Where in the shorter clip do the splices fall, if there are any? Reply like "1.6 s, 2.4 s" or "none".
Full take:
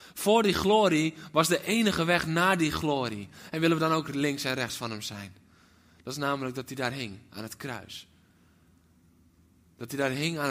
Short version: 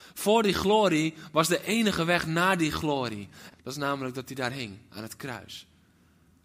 3.5 s